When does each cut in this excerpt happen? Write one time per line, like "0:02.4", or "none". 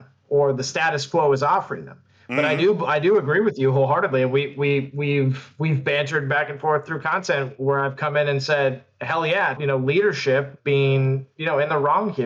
0:09.6